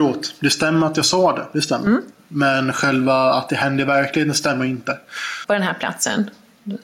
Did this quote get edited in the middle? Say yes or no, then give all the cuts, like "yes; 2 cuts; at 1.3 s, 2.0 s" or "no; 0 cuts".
yes; 1 cut; at 5.4 s